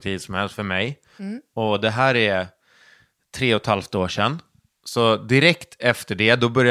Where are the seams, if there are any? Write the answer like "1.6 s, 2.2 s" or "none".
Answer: 1.2 s